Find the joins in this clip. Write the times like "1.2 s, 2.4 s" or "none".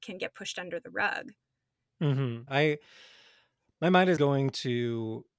2.5 s, 4.2 s